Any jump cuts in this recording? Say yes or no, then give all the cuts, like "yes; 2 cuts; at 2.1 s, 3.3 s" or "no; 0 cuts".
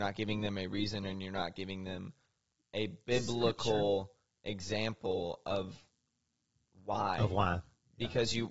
no; 0 cuts